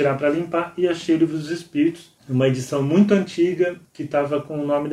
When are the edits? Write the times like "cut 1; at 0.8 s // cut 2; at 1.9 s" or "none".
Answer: cut 1; at 2.2 s // cut 2; at 3.8 s